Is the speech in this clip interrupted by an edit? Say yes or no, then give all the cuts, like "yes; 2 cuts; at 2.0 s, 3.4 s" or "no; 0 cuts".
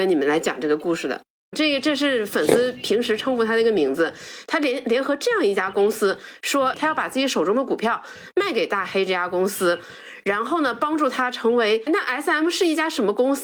yes; 2 cuts; at 1.5 s, 11.9 s